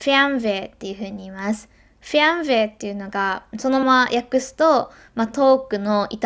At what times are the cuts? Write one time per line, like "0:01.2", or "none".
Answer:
0:03.8